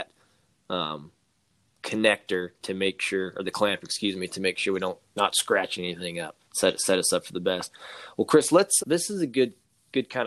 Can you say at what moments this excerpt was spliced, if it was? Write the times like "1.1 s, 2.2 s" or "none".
6.4 s, 8.8 s